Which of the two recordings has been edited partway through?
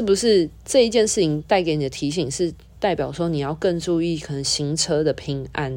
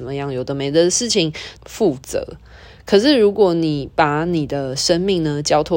second; 1 cut; at 1.6 s

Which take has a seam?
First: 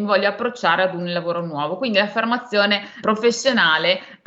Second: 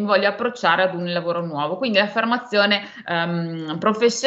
first; 1 cut; at 3.0 s

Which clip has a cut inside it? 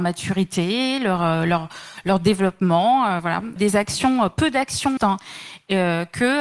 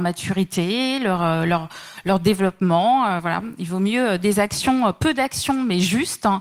first; 2 cuts; at 3.6 s, 5.0 s

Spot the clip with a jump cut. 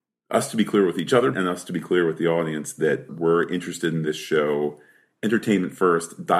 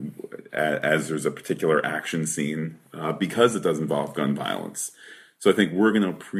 first; 2 cuts; at 1.3 s, 3.1 s

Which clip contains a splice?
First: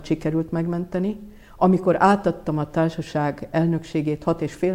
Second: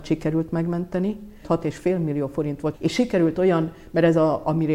second; 2 cuts; at 1.4 s, 2.7 s

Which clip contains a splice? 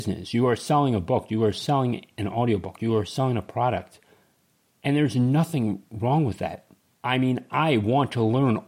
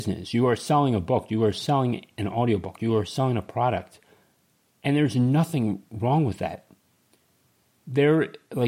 first; 1 cut; at 6.9 s

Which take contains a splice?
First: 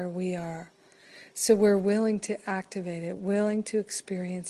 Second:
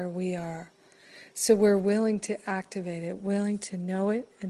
second; 1 cut; at 3.2 s

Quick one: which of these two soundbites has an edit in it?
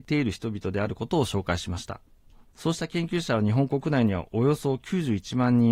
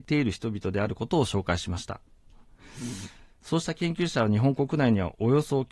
first; 1 cut; at 2.5 s

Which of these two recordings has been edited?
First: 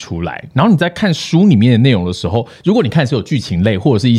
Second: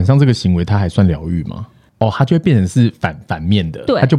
second; 1 cut; at 1.9 s

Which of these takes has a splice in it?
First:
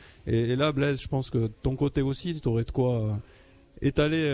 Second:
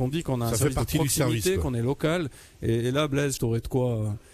second; 1 cut; at 3.4 s

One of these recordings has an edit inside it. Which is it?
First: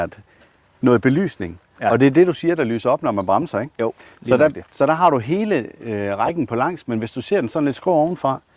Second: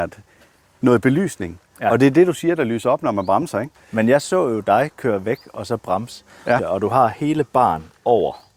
second; 2 cuts; at 3.8 s, 6.6 s

